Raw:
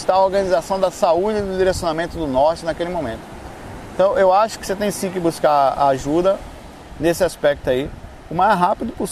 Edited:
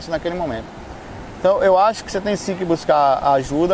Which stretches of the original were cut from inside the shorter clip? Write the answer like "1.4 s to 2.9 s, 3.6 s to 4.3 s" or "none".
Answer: none